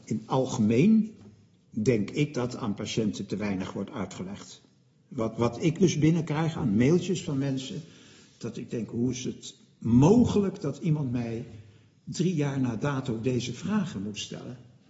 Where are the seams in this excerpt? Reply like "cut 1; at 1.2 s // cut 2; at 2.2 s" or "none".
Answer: none